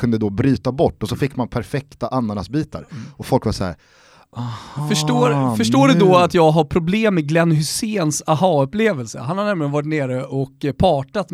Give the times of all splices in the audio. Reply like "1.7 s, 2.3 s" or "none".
none